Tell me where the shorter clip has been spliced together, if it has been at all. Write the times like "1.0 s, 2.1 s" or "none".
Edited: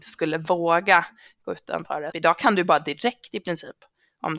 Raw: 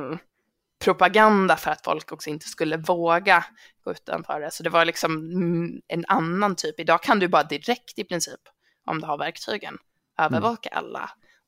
2.1 s